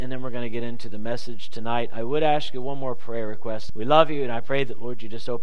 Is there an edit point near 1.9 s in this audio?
no; 1 cut; at 3.7 s

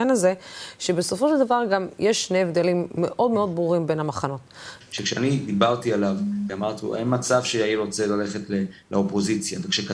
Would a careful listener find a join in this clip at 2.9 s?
no; 2 cuts; at 4.8 s, 6.5 s

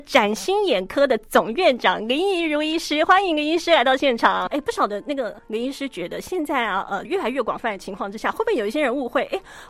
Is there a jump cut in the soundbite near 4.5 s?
yes; 2 cuts; at 4.5 s, 7.0 s

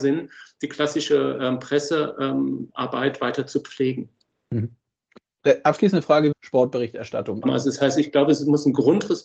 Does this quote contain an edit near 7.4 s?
yes; 2 cuts; at 6.3 s, 7.4 s

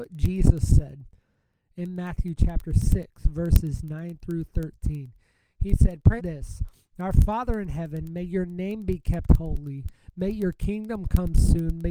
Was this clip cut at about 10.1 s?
no; 1 cut; at 6.2 s

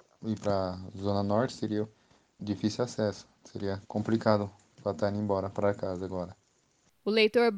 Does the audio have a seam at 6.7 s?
no; 2 cuts; at 2.4 s, 3.8 s

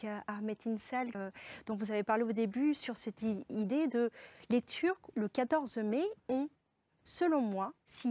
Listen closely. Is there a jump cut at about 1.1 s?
yes; 3 cuts; at 1.1 s, 5.1 s, 6.2 s

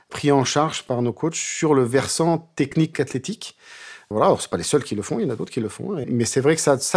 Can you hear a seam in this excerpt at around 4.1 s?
yes; 2 cuts; at 4.1 s, 6.0 s

